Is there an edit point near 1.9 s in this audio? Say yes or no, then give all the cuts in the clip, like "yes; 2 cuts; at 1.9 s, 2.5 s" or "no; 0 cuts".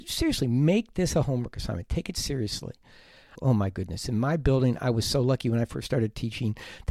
no; 1 cut; at 3.3 s